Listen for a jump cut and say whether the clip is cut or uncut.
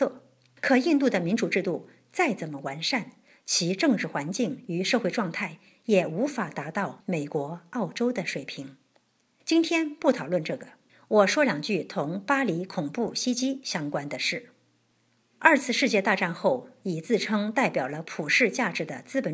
uncut